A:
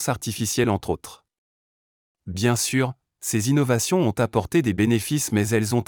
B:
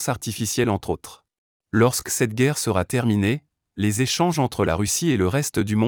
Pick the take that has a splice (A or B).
B